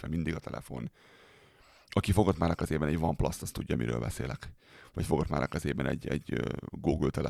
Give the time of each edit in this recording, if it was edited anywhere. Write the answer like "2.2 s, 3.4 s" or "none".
none